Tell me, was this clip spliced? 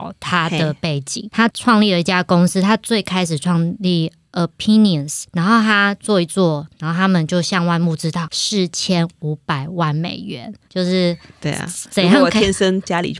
yes; 1 cut; at 10.7 s

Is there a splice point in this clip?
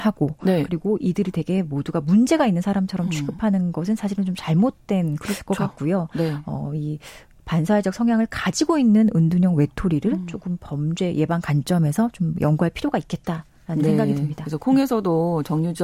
no; 0 cuts

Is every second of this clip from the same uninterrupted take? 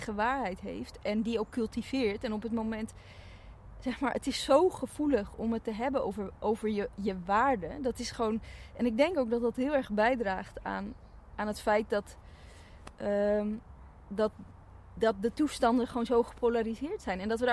yes; 0 cuts

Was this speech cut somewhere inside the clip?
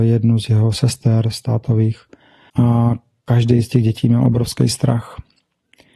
yes; 1 cut; at 2.5 s

